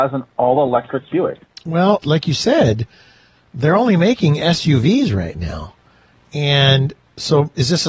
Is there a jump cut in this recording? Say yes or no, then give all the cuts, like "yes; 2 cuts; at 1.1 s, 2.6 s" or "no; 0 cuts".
yes; 1 cut; at 2.0 s